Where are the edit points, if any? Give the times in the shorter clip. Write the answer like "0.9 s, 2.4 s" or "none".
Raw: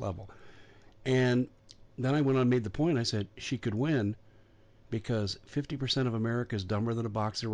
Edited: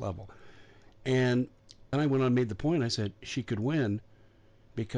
1.9 s